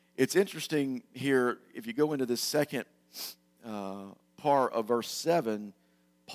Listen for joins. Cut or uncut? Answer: uncut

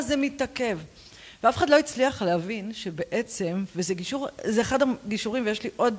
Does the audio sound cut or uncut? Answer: uncut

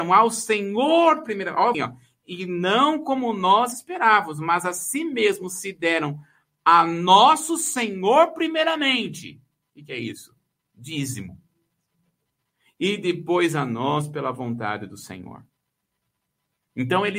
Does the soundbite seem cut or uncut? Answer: cut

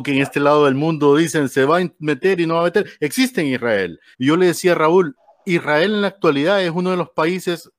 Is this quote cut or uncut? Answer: cut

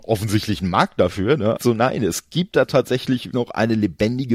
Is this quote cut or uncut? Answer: cut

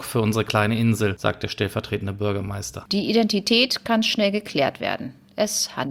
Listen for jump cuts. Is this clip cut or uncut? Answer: cut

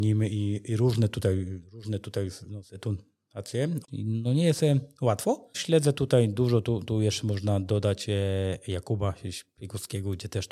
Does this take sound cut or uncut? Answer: cut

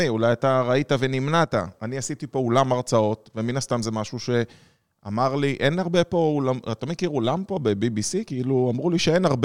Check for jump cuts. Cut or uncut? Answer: uncut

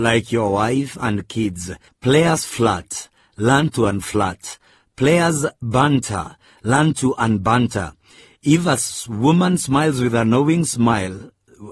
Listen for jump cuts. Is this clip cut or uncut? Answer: cut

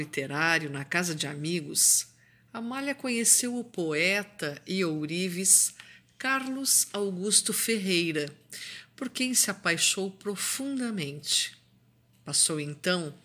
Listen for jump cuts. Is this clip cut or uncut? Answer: uncut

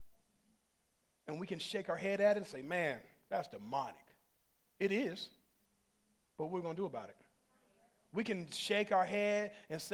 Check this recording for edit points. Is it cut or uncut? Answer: uncut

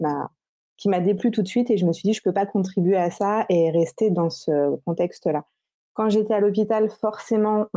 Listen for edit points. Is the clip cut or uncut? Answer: uncut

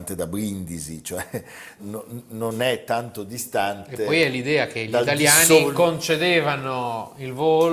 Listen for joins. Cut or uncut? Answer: cut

